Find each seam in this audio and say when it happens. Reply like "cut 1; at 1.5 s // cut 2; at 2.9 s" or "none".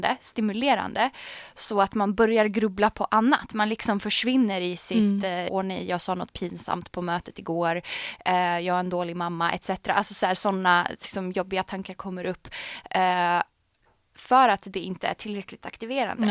cut 1; at 5.5 s